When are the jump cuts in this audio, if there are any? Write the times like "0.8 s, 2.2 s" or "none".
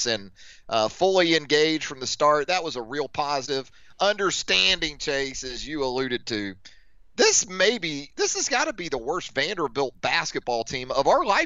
none